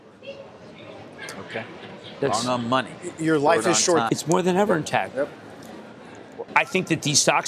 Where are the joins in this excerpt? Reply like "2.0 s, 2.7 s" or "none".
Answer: 4.1 s, 6.5 s